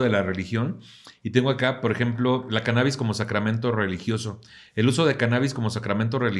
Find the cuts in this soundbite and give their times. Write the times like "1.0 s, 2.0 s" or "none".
none